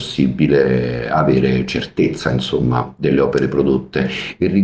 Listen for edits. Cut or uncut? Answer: uncut